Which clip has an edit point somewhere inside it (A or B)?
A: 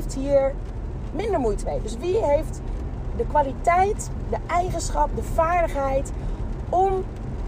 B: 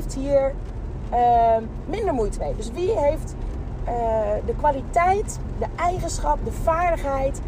A